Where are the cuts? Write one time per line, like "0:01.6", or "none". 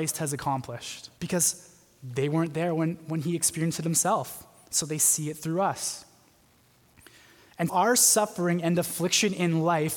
0:01.2
0:07.7